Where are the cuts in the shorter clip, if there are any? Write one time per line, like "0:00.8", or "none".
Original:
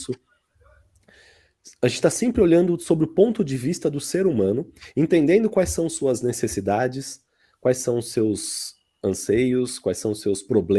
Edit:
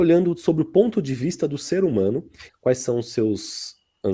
0:02.5